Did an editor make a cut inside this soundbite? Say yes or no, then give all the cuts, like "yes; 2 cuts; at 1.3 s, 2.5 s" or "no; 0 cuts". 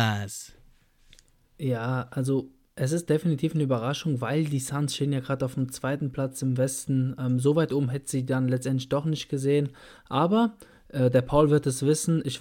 no; 0 cuts